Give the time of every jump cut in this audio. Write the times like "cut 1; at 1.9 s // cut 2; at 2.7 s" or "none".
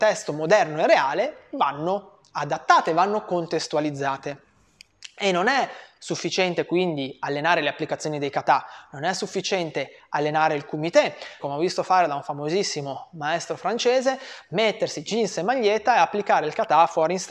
cut 1; at 11.4 s